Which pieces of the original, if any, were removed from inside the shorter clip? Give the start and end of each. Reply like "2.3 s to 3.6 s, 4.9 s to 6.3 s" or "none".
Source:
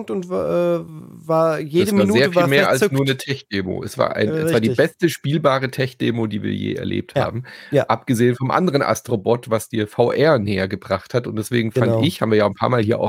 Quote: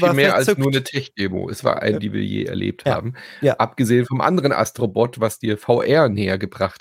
4.3 s to 6.3 s

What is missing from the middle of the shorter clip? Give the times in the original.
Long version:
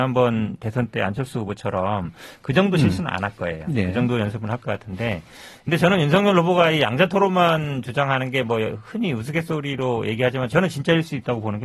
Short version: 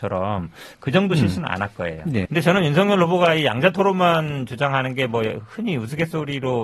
3.9 s to 5.6 s

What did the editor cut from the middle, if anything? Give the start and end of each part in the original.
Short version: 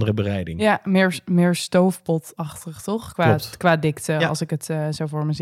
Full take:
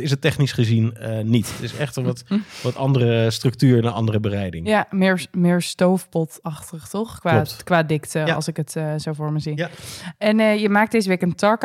none

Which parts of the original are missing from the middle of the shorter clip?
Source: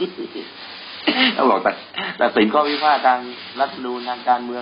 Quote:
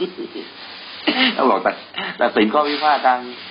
none

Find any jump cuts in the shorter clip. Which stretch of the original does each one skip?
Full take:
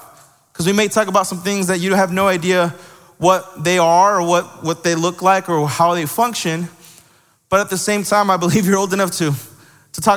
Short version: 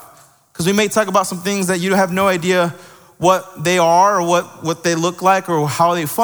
none

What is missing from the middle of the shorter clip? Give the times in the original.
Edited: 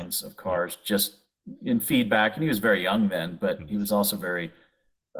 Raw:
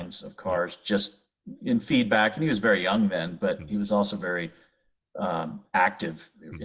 none

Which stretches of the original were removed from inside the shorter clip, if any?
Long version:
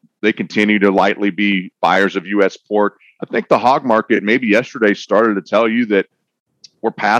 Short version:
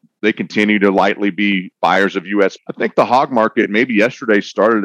2.6 s to 3.1 s

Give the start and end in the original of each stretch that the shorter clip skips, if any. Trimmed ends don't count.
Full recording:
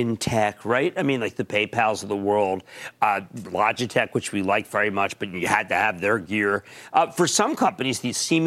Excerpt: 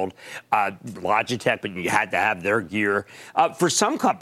4.1 s to 5.2 s

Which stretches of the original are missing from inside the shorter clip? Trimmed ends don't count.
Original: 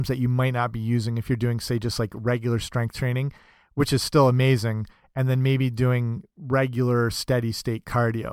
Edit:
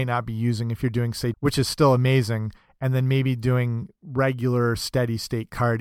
1.8 s to 3.7 s

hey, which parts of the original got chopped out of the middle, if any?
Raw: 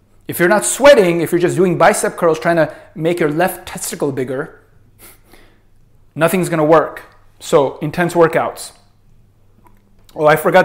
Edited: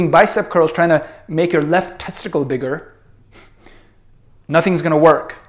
none

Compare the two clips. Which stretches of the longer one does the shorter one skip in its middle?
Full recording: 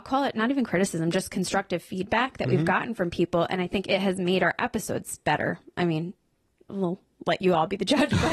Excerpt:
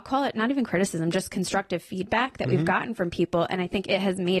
none

